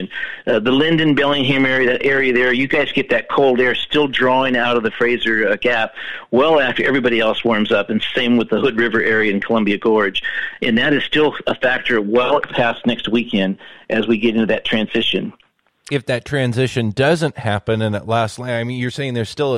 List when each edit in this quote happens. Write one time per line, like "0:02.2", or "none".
none